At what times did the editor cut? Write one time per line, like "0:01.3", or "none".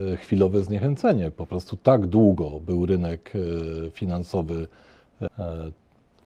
0:05.3